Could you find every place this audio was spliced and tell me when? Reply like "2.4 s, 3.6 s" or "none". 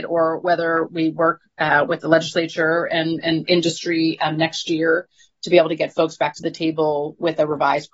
none